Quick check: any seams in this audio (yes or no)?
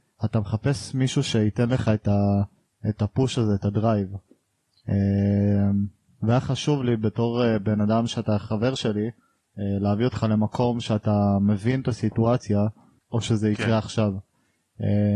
yes